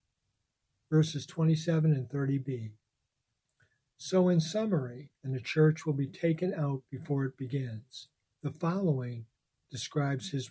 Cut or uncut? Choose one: cut